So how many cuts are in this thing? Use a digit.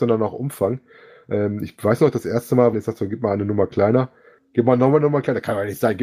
2